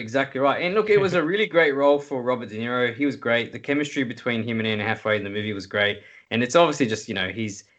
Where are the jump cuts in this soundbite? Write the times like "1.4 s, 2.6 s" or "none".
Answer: none